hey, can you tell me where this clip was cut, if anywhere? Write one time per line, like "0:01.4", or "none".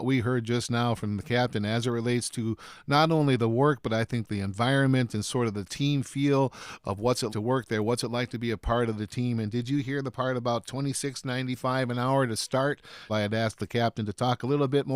0:07.3
0:13.1